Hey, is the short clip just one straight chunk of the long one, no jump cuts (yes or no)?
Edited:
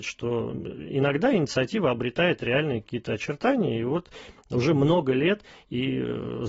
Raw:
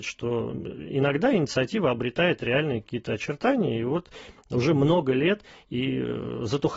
yes